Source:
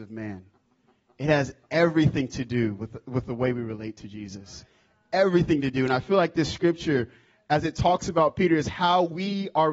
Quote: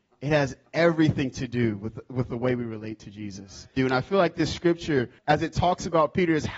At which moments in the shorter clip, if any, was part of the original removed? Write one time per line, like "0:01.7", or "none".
0:03.8
0:05.2